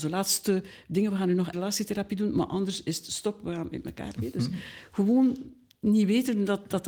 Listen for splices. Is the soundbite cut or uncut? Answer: cut